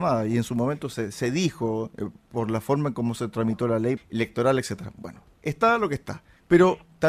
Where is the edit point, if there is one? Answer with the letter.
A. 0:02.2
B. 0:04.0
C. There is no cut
B